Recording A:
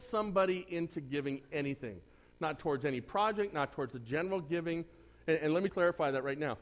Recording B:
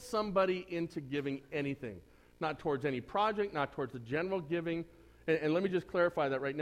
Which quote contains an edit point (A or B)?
A